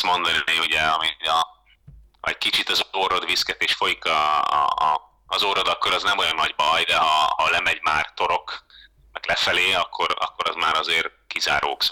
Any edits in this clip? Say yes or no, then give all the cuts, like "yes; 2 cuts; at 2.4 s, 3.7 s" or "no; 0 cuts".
no; 0 cuts